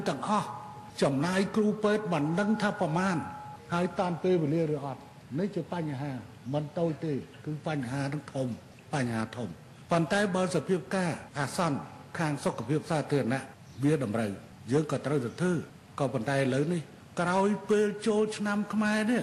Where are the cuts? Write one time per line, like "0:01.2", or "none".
none